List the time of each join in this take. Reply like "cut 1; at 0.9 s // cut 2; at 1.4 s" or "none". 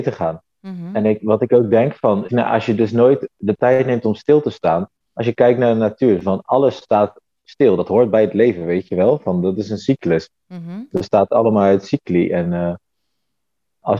cut 1; at 2.3 s